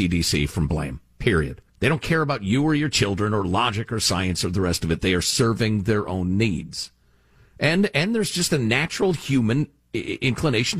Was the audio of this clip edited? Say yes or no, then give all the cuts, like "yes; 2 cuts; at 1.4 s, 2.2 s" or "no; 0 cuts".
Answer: yes; 1 cut; at 1.7 s